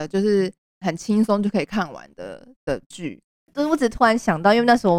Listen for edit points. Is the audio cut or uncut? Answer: cut